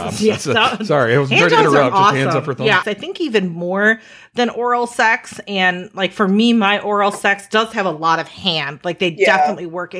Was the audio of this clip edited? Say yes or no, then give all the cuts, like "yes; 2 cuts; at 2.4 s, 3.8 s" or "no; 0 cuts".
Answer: yes; 1 cut; at 2.8 s